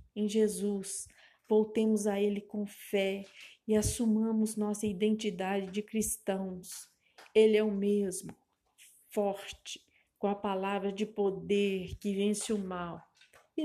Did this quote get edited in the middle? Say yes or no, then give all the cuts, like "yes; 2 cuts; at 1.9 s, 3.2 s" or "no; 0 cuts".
no; 0 cuts